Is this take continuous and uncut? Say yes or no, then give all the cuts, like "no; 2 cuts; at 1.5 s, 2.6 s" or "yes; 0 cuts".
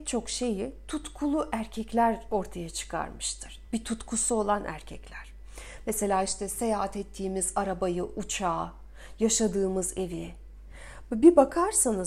yes; 0 cuts